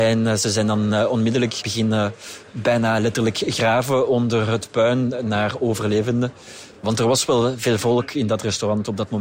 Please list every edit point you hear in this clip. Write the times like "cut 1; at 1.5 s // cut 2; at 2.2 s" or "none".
none